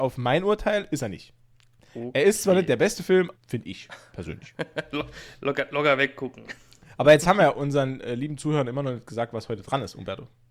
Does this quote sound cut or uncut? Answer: cut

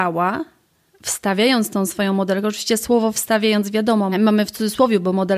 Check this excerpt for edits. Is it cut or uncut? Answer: cut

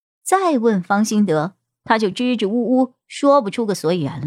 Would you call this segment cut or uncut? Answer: uncut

